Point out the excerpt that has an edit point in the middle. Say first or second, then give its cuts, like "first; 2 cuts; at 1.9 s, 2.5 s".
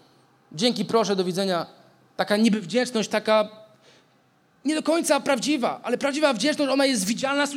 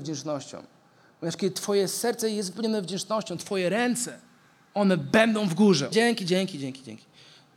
second; 1 cut; at 5.9 s